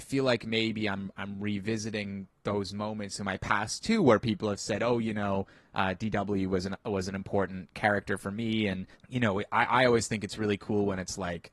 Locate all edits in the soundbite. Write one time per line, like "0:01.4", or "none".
0:08.9